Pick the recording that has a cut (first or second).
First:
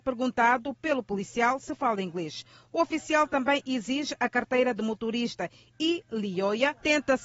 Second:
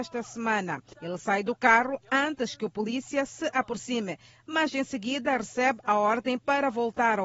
second